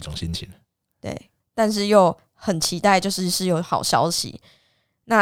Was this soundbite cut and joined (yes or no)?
yes